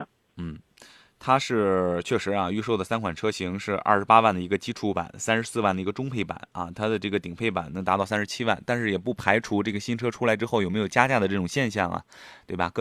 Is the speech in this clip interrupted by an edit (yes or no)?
no